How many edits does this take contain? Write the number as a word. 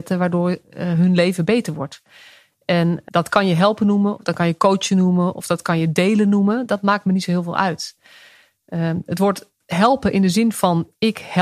one